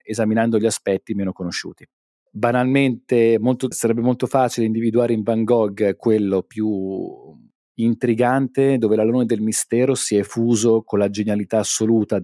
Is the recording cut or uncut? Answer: cut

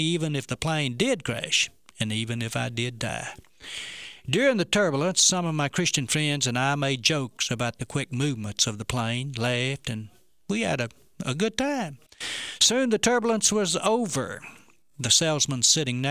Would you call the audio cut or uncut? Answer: uncut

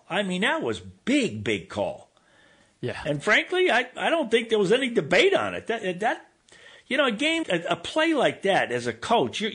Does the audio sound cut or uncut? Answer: cut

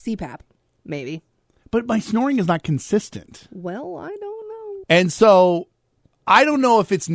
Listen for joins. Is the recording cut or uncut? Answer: cut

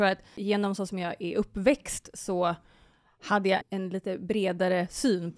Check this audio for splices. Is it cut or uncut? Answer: cut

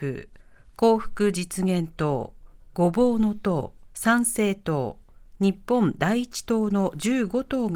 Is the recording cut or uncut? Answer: cut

